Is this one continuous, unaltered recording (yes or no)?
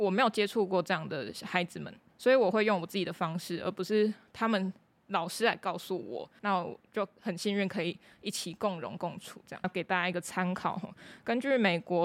no